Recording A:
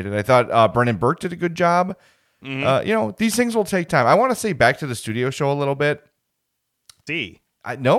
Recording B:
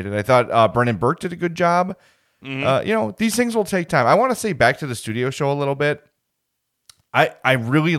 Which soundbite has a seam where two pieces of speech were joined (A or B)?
A